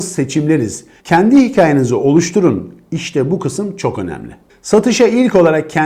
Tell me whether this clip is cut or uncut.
cut